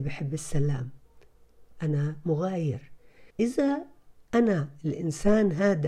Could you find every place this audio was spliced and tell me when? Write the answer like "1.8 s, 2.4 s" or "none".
3.3 s